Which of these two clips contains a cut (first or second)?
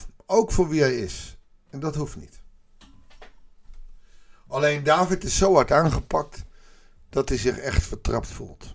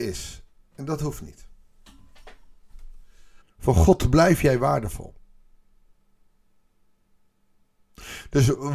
second